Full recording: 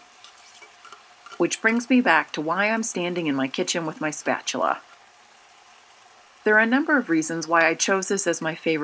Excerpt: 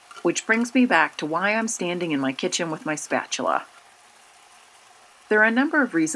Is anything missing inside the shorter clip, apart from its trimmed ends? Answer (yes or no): no